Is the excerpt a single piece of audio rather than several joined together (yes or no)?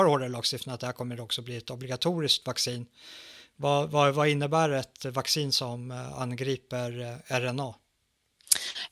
yes